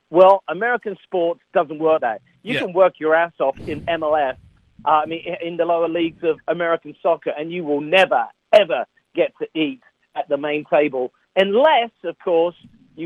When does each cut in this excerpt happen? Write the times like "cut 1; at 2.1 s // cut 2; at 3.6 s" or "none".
cut 1; at 2.0 s // cut 2; at 6.4 s

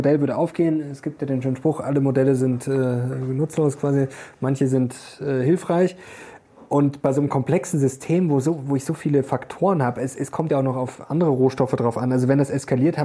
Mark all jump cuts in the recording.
none

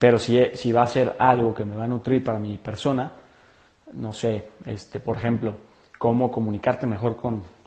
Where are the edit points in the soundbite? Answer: none

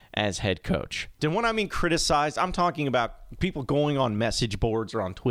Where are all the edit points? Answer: cut 1; at 1.2 s

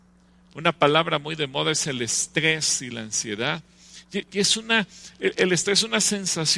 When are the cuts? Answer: none

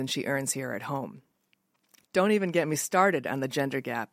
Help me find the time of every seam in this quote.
cut 1; at 2.0 s

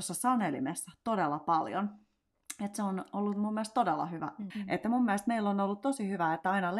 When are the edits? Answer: cut 1; at 4.5 s

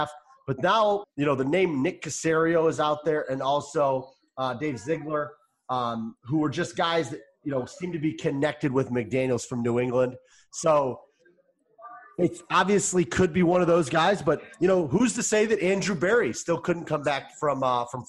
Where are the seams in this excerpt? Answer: cut 1; at 1.0 s

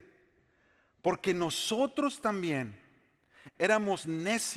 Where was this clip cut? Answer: cut 1; at 3.6 s

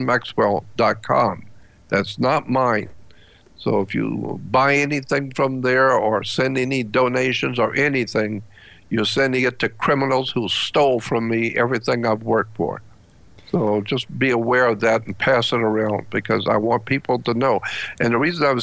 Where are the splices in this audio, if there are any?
none

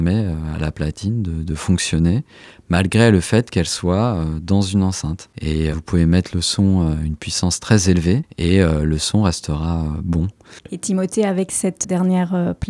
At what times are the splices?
cut 1; at 5.7 s

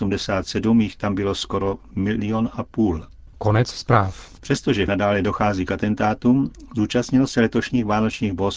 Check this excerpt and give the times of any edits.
cut 1; at 3.3 s // cut 2; at 4.4 s

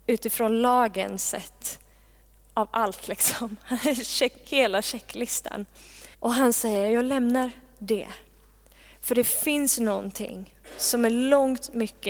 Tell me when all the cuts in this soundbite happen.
cut 1; at 6.1 s

